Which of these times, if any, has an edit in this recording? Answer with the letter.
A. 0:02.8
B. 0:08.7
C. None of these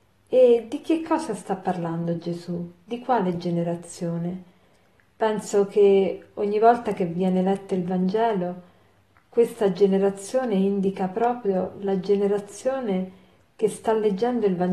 C